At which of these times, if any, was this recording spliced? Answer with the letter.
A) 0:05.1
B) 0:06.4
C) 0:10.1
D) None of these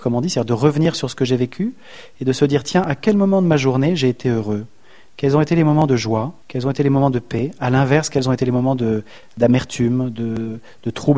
B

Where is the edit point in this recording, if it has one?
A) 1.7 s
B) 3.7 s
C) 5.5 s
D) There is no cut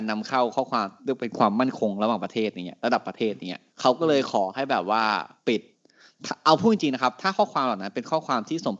B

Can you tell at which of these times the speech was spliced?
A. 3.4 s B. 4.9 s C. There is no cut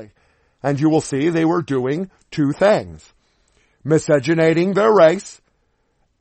C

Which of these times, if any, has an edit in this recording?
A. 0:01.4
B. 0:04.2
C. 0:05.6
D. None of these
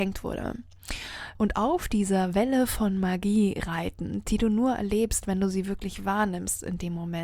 A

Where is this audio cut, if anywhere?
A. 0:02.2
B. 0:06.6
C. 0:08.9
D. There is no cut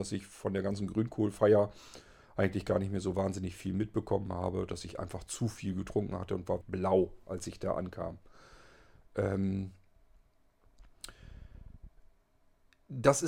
B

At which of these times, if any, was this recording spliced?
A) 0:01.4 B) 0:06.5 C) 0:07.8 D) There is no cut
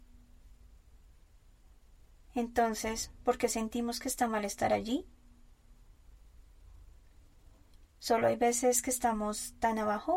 C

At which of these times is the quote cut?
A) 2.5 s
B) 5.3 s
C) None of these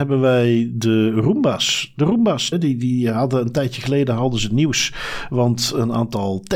A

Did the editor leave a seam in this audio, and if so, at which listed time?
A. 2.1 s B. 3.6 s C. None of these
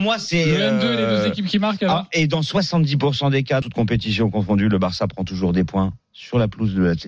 B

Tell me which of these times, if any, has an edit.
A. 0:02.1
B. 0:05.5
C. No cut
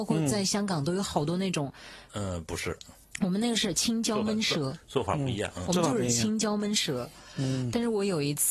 A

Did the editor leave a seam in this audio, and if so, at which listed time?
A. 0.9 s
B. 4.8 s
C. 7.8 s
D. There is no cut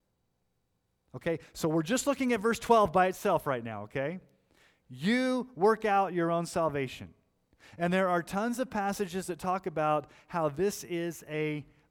D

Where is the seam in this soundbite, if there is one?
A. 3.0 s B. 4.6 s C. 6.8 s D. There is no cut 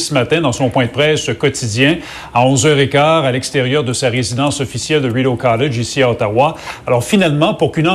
D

